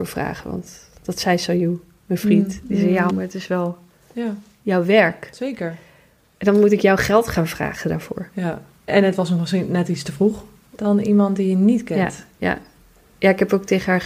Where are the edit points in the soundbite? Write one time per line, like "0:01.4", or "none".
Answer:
0:03.1
0:08.9
0:10.8